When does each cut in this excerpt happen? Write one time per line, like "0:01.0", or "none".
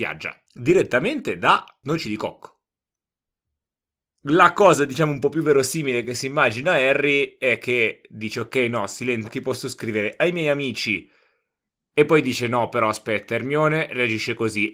0:09.2